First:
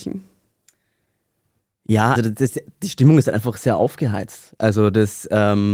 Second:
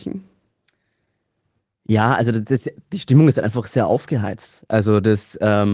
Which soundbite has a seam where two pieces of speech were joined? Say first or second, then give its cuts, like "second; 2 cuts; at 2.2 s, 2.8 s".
first; 1 cut; at 2.1 s